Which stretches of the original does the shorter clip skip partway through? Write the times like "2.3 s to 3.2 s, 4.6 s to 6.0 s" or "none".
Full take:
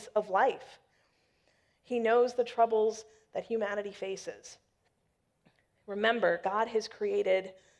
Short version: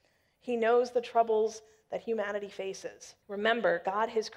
4.6 s to 5.8 s